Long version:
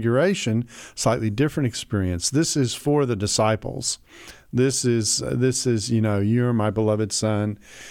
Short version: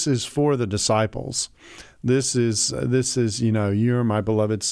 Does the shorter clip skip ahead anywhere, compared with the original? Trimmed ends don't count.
no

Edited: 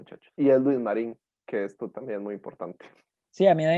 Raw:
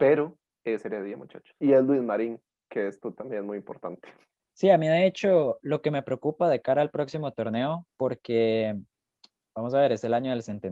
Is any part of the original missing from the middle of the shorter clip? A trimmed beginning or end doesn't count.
no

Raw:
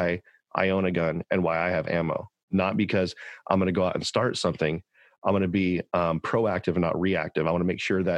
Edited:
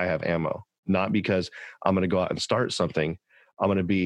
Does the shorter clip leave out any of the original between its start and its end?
no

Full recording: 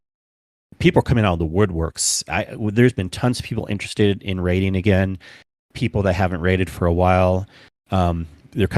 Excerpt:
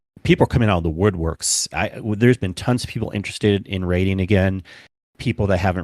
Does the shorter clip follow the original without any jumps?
yes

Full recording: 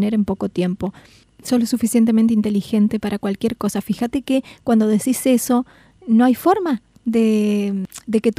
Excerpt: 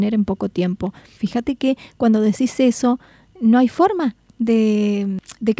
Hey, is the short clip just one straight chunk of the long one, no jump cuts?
no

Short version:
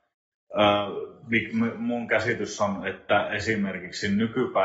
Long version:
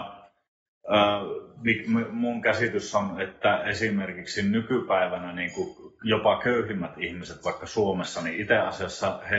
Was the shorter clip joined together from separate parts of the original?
no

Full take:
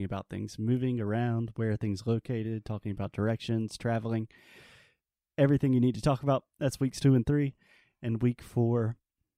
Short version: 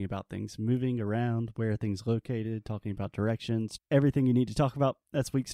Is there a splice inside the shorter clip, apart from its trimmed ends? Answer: yes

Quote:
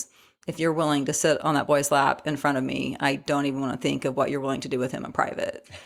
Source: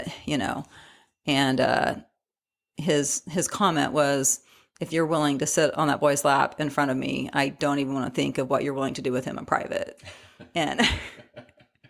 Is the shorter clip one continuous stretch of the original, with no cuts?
yes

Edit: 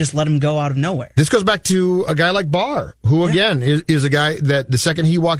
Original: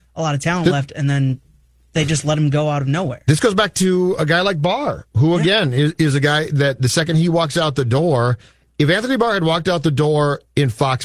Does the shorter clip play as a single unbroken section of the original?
yes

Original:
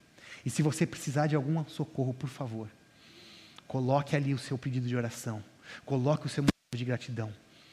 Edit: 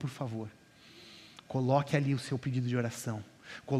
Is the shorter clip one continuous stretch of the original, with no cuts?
yes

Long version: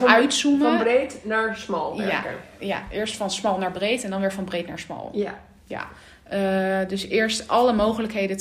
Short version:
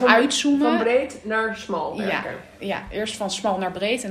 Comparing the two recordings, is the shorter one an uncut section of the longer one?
yes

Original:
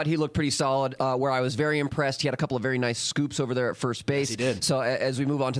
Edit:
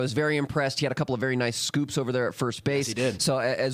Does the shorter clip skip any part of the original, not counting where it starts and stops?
no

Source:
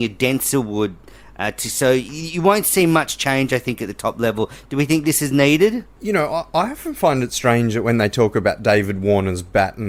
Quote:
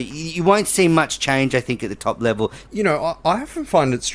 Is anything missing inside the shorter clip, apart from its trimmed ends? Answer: yes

